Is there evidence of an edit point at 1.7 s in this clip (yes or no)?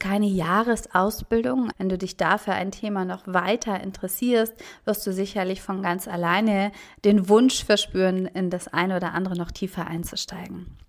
yes